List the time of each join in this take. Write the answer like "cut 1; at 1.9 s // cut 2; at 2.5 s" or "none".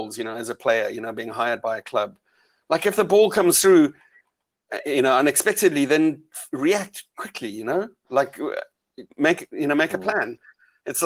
cut 1; at 2.5 s // cut 2; at 9.1 s